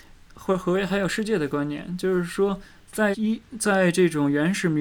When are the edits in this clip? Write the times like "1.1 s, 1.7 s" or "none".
3.1 s